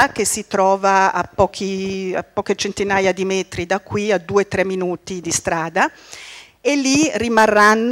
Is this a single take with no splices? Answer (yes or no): yes